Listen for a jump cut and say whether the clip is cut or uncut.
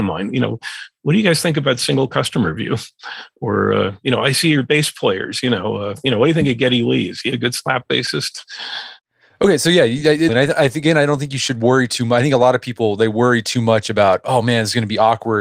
cut